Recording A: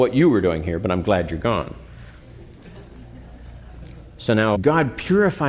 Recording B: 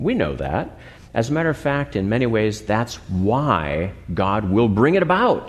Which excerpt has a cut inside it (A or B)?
A